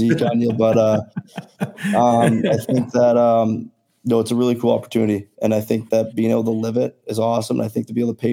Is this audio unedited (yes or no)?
yes